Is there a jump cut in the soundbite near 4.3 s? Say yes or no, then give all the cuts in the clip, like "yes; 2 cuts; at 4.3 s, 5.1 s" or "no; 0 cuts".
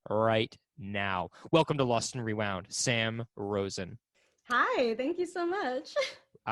no; 0 cuts